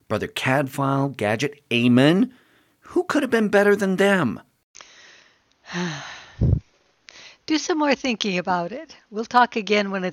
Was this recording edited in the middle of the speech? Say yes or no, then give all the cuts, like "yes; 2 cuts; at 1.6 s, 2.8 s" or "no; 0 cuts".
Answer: no; 0 cuts